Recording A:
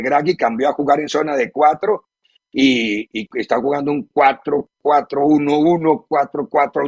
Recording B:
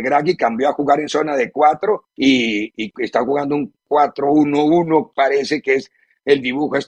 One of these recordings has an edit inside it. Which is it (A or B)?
B